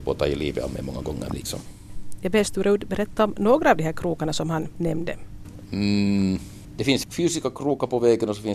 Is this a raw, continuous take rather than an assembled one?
yes; 0 cuts

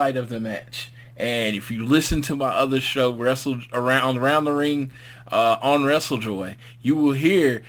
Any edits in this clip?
no; 0 cuts

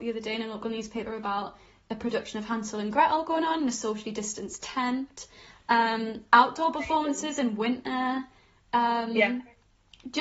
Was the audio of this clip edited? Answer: no; 0 cuts

